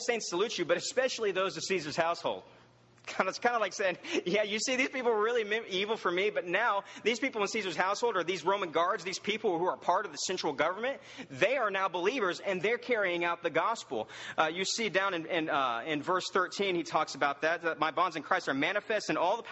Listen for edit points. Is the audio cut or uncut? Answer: uncut